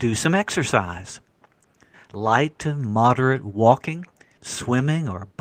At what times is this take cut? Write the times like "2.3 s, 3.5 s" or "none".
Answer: 1.9 s, 4.4 s